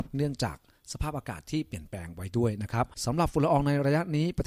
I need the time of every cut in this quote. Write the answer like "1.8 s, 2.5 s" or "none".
2.9 s